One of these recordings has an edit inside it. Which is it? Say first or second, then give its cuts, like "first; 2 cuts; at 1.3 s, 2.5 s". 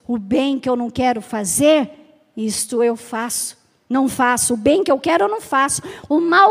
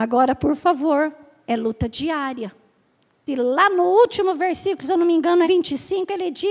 second; 2 cuts; at 3.3 s, 5.4 s